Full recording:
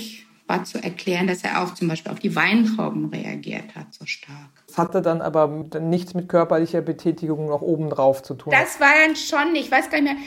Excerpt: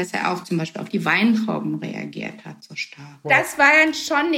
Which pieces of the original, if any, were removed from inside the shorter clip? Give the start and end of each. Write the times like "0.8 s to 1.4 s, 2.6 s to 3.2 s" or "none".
4.5 s to 8.5 s